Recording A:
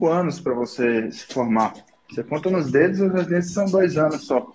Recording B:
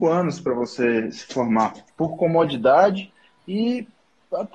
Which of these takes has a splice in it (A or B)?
B